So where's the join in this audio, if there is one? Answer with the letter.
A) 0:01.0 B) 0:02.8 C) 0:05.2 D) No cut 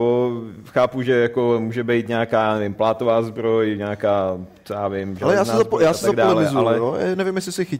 D